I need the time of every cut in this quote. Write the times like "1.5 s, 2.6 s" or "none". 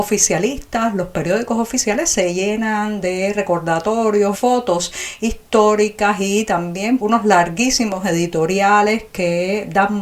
4.3 s, 7.0 s